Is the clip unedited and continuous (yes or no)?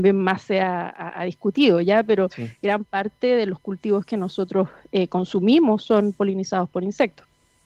yes